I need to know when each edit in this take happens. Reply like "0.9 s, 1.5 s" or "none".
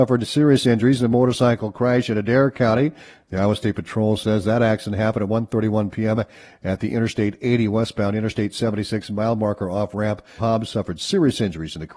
10.4 s